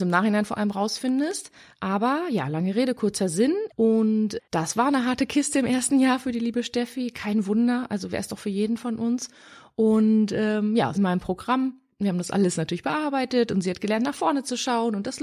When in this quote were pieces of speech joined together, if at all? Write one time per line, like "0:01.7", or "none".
0:03.7
0:10.9

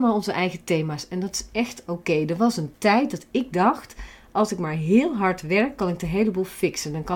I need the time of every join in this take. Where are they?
none

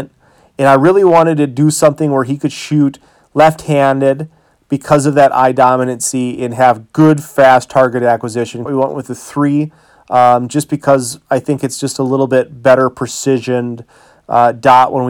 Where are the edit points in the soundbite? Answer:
0:08.7

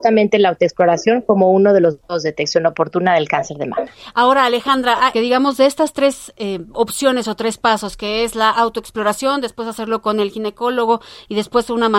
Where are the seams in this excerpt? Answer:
0:05.1

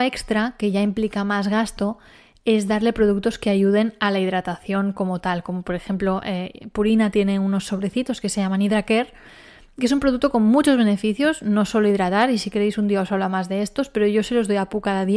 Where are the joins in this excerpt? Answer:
none

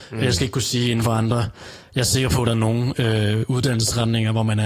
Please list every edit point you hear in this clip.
none

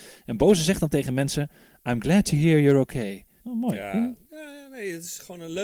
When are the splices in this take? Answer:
0:03.4

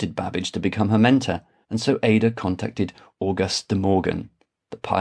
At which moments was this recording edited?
0:01.6

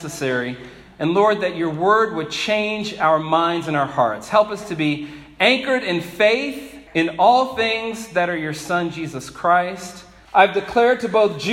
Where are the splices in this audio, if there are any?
0:06.9
0:10.3

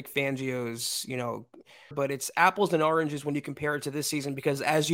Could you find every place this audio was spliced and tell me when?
0:01.9

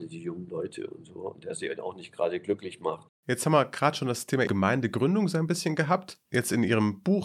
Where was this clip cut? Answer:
0:03.1

